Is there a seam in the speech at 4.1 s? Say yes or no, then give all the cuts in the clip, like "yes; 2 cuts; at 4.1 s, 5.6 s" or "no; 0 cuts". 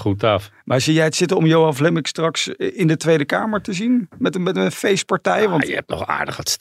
no; 0 cuts